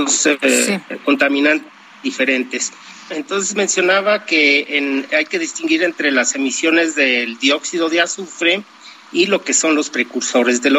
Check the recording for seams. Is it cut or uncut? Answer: cut